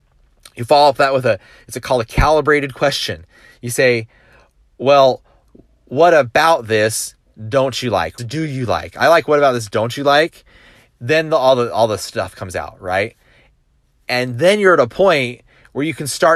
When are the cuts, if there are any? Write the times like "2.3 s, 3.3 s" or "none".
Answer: 8.2 s